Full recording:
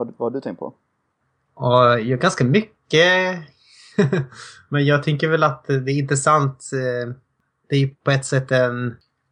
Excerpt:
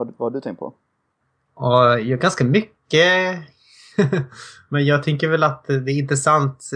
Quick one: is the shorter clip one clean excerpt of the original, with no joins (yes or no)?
yes